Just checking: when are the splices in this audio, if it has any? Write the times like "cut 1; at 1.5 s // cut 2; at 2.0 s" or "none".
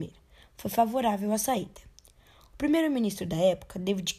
none